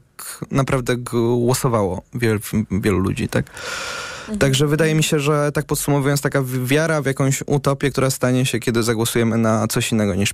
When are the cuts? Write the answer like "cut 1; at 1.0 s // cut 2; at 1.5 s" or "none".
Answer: none